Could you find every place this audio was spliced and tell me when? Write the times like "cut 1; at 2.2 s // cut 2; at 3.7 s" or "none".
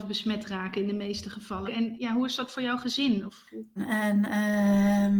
cut 1; at 1.7 s // cut 2; at 3.8 s